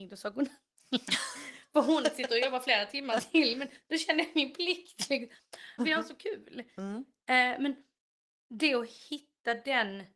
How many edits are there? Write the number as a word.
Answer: one